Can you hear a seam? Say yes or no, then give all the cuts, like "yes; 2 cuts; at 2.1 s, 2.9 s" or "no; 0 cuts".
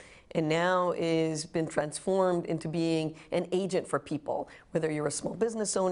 no; 0 cuts